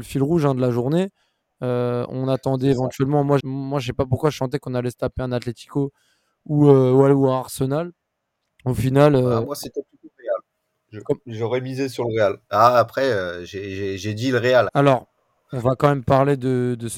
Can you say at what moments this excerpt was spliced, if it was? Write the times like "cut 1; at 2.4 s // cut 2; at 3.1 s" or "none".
cut 1; at 3.4 s // cut 2; at 14.7 s